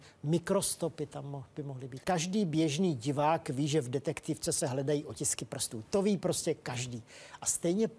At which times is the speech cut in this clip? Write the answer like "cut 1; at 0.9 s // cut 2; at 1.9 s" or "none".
cut 1; at 2.0 s

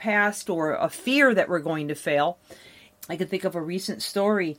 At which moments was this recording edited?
cut 1; at 2.9 s

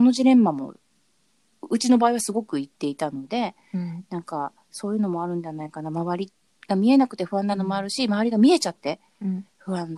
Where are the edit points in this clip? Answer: none

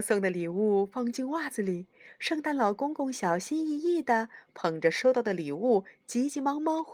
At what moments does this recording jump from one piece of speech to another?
none

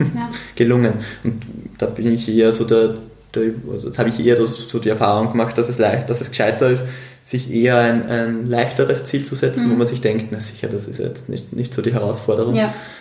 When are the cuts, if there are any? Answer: none

